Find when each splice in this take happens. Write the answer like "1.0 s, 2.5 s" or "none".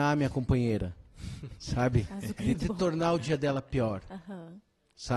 2.5 s

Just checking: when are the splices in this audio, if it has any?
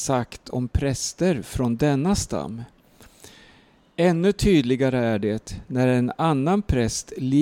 none

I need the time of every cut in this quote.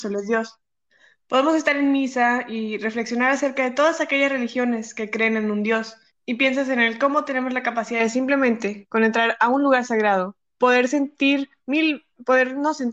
6.1 s, 10.4 s

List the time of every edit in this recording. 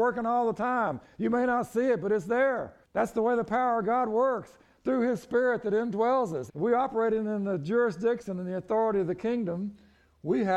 2.8 s, 6.5 s

